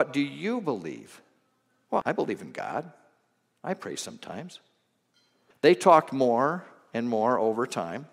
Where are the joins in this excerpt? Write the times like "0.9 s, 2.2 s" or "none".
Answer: 2.0 s, 5.5 s